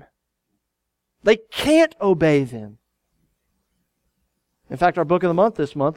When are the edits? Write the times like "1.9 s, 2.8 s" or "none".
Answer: none